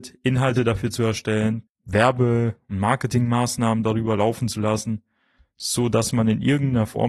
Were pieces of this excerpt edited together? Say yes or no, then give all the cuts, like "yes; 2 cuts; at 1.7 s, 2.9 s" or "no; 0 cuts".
yes; 1 cut; at 1.7 s